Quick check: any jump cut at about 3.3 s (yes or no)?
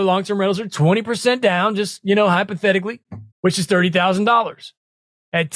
yes